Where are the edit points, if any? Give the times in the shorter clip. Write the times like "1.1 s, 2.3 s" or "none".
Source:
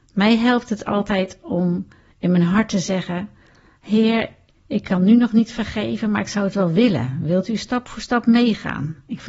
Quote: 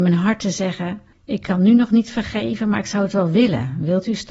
1.1 s